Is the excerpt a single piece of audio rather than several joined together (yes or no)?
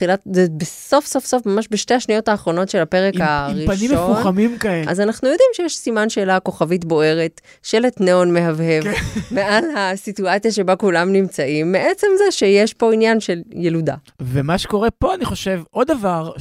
no